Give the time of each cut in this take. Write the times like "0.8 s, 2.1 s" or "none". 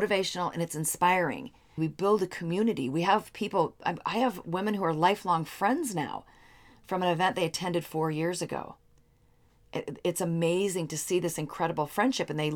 1.8 s